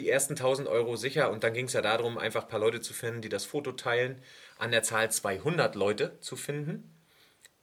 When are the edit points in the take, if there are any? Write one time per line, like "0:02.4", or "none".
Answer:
none